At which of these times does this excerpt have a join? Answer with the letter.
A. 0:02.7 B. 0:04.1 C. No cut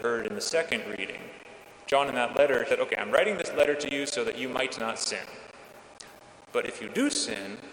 A